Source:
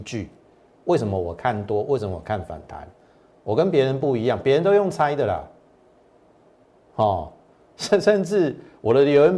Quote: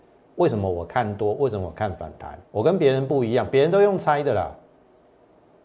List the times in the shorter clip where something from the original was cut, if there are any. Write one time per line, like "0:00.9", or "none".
0:02.5